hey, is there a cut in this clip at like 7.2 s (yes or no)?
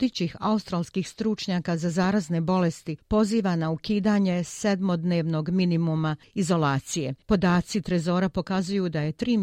yes